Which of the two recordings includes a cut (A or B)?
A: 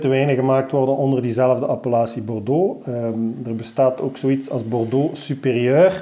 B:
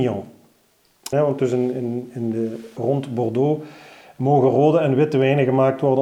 B